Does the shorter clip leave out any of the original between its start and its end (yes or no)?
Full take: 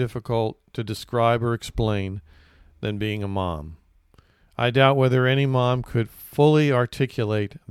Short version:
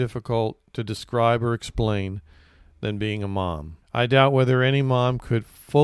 yes